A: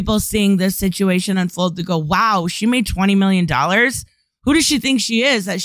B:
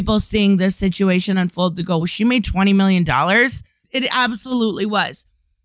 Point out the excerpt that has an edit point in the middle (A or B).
B